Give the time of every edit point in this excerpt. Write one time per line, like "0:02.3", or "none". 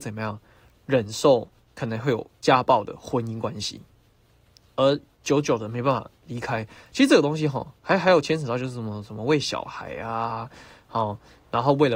none